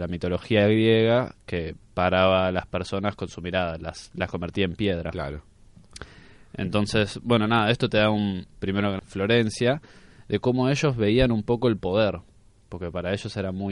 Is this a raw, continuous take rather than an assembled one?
no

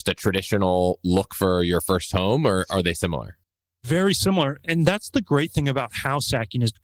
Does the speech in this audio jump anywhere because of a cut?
no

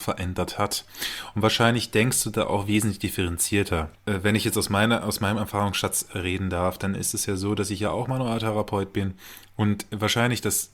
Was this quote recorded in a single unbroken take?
yes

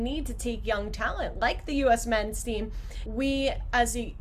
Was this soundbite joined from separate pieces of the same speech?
yes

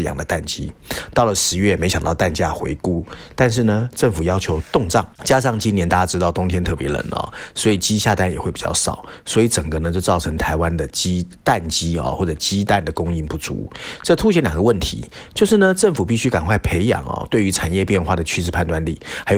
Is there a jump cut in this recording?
yes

